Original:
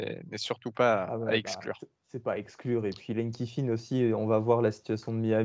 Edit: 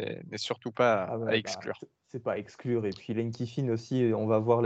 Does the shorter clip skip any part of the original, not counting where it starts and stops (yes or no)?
no